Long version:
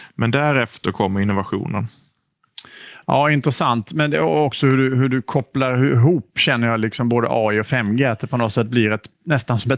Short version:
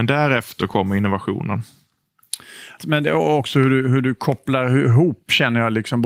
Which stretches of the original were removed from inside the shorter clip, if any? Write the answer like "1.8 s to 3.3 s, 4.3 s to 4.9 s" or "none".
3.0 s to 3.9 s